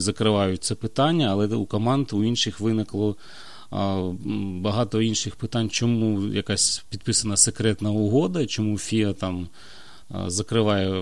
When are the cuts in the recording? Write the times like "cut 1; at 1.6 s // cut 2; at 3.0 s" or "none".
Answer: none